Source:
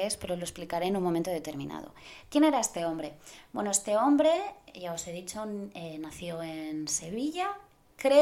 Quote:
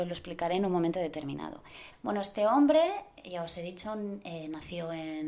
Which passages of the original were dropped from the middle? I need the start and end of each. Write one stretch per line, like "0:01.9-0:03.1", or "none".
0:02.2-0:03.4